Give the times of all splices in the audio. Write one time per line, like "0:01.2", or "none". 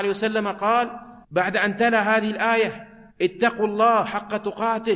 0:01.2
0:03.1